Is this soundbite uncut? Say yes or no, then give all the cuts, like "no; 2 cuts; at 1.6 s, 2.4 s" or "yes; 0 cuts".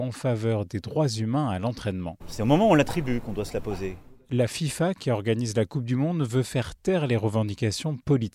no; 1 cut; at 2.2 s